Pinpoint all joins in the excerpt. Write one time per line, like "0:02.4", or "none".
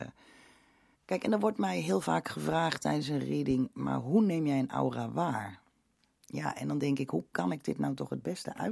0:00.9